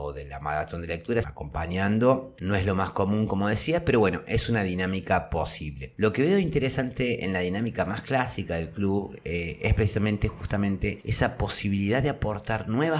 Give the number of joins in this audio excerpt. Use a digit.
1